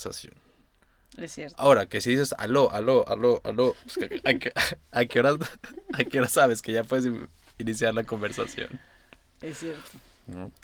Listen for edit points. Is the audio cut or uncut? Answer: uncut